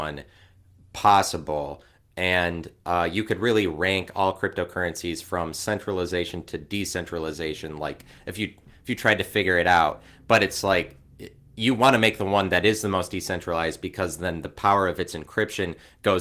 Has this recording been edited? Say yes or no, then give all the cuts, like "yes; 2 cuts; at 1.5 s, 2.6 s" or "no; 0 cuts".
no; 0 cuts